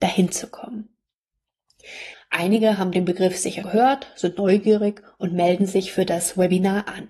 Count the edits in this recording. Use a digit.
2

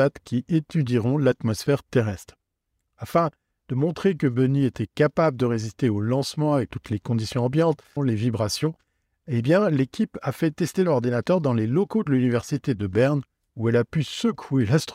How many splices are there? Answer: 1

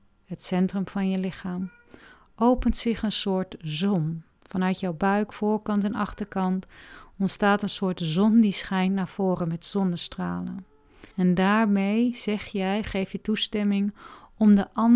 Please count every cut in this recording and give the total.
1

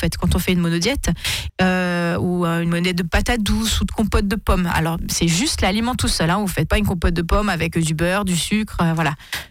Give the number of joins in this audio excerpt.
1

